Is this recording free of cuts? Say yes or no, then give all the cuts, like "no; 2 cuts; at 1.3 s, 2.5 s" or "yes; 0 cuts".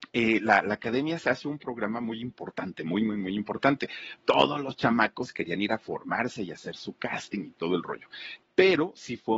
no; 1 cut; at 8.4 s